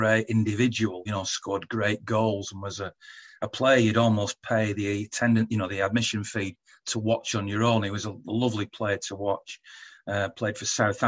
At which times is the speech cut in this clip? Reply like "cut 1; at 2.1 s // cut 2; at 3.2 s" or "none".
none